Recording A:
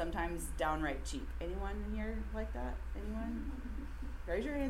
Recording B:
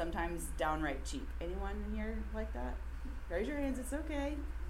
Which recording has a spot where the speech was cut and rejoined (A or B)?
B